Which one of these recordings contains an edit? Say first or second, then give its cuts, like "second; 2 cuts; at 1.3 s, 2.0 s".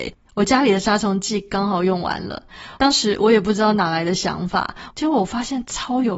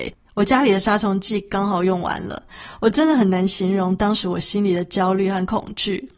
first; 2 cuts; at 2.8 s, 4.9 s